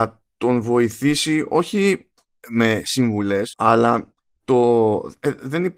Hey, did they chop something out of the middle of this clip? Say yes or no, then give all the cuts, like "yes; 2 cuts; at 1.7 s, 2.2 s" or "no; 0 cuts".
yes; 1 cut; at 3.5 s